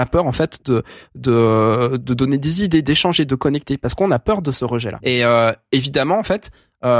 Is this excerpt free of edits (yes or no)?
no